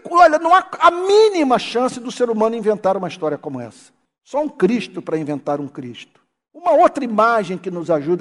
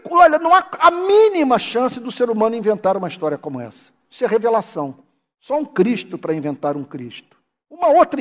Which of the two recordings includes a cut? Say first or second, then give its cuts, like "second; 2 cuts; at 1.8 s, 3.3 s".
first; 1 cut; at 4.1 s